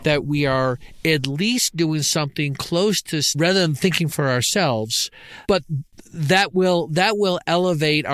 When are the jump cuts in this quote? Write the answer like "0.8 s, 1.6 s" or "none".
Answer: 3.3 s, 5.4 s